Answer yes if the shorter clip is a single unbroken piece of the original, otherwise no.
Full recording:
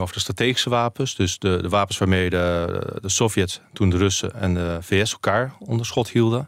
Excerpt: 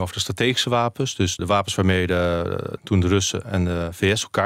no